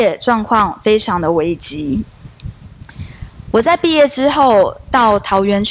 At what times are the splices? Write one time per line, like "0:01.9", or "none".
none